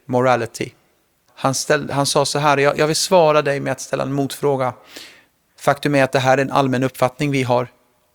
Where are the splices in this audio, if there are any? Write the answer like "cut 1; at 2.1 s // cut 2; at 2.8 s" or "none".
cut 1; at 1.3 s // cut 2; at 5.5 s

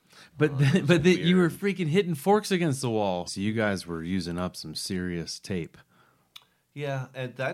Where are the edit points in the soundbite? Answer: cut 1; at 3.3 s

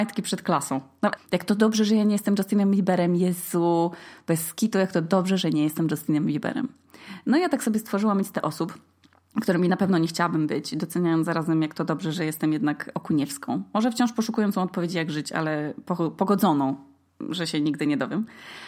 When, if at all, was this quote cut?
cut 1; at 1.2 s

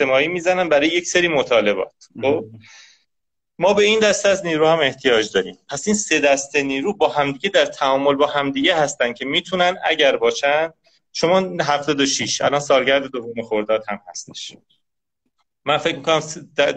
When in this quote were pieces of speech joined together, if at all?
none

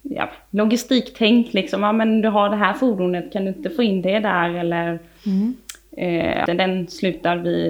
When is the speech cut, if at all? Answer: cut 1; at 6.5 s

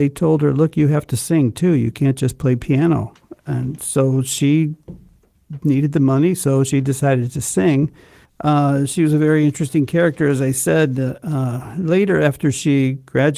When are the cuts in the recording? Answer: cut 1; at 8.2 s

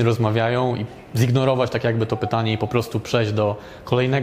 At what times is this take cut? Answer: none

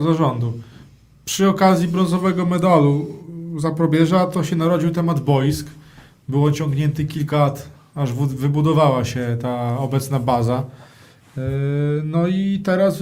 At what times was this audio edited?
none

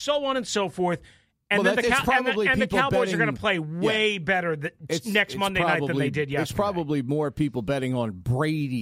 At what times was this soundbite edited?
none

